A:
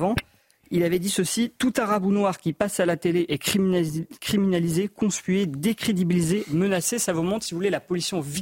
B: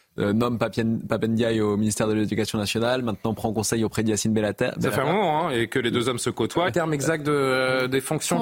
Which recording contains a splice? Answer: B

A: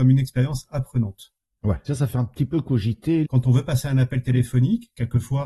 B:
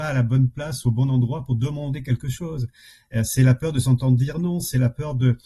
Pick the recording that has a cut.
A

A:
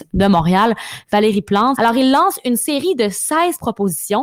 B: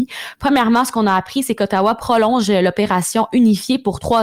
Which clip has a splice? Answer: A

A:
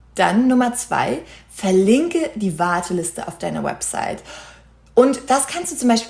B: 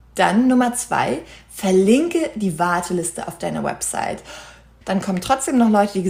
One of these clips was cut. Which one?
B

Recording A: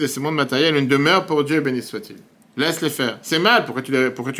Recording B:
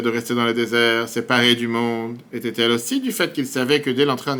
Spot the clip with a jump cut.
A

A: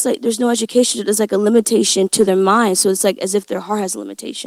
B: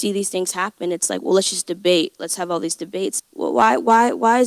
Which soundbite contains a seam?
B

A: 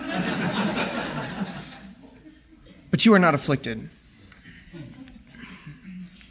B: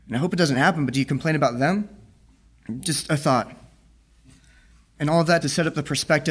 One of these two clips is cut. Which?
B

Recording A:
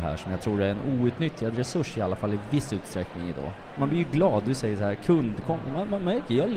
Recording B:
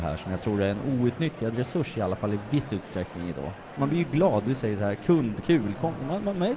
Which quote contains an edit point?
A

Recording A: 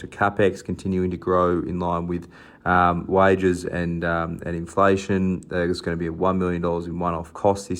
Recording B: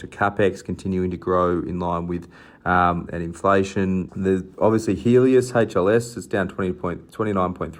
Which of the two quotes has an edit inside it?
B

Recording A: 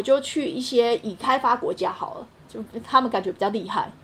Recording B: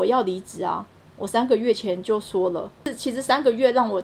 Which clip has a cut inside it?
B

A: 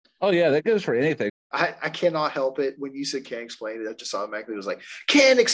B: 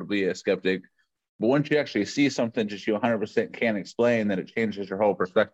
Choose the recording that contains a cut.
A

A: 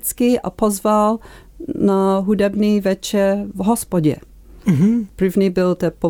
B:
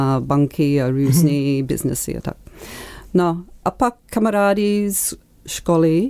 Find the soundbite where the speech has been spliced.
A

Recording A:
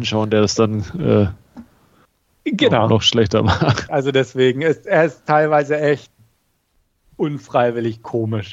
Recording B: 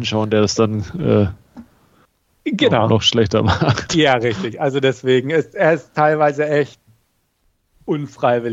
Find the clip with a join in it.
A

